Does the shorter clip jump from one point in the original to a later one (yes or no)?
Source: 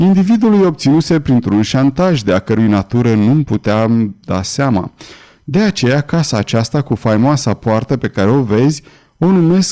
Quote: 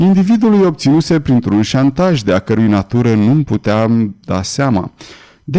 no